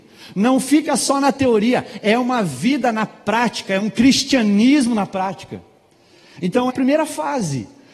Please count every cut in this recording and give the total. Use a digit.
1